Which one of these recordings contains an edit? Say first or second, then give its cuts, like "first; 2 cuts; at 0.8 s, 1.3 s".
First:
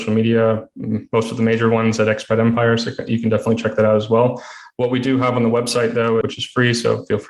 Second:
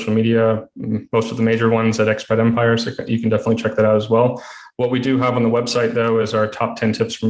first; 1 cut; at 6.2 s